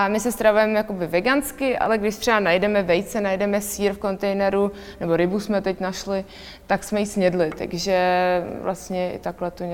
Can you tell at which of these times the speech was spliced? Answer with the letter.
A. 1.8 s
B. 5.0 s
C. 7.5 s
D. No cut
D